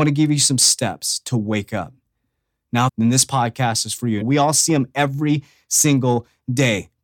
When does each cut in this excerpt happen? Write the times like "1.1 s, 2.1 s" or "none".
2.9 s, 4.2 s